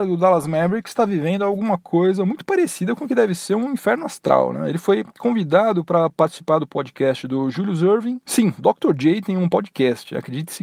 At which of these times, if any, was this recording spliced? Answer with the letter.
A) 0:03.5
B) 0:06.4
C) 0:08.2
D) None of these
D